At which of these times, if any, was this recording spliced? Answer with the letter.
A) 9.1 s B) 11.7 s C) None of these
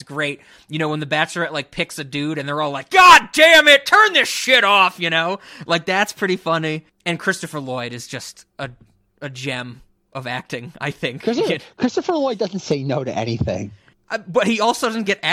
C